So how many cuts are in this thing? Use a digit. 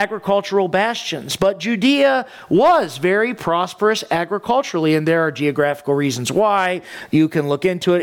0